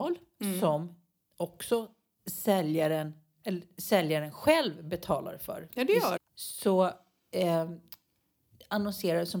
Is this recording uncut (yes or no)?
no